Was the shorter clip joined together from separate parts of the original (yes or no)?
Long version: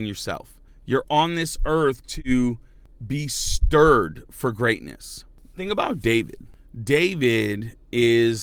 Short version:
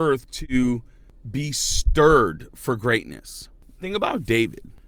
no